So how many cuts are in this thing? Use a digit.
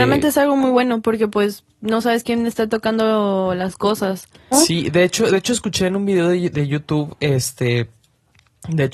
1